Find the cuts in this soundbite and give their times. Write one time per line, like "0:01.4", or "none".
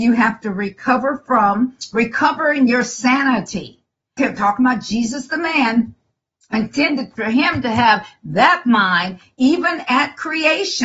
0:04.2